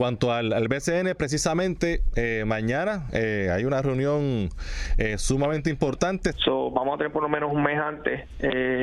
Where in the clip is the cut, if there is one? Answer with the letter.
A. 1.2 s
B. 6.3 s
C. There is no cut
B